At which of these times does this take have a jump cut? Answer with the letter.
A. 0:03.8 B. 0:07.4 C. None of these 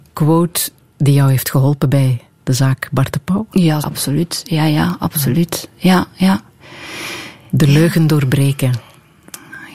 A